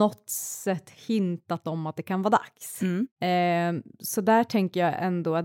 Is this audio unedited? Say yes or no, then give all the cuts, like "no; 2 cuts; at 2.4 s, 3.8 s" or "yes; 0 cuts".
no; 1 cut; at 3.1 s